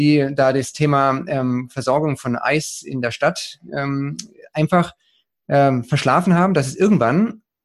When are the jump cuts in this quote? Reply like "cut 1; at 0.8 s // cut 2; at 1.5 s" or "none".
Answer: none

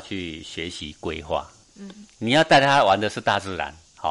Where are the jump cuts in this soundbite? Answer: cut 1; at 1.6 s

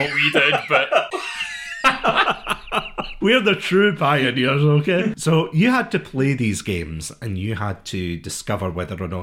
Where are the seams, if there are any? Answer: cut 1; at 1.1 s

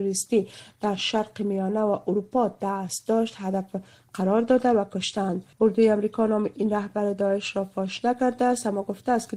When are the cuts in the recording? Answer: cut 1; at 5.5 s

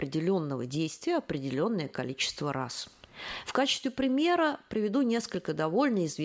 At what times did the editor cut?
cut 1; at 3.4 s

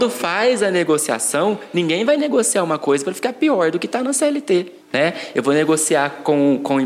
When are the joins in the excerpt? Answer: cut 1; at 4.8 s

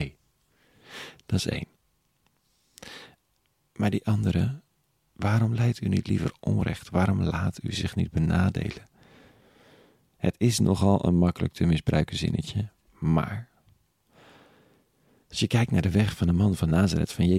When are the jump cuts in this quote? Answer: none

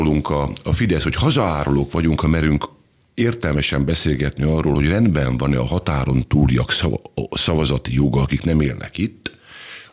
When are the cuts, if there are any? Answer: none

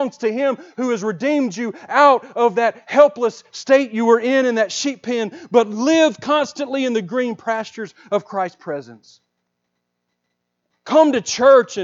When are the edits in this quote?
cut 1; at 10.7 s

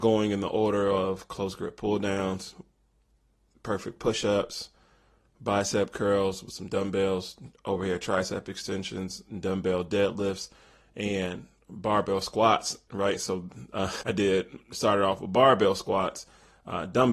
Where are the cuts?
cut 1; at 12.9 s // cut 2; at 14.0 s

